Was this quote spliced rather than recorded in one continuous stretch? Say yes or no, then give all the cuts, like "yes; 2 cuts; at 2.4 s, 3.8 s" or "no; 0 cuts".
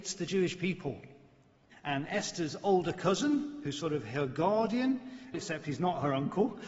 yes; 2 cuts; at 1.7 s, 5.3 s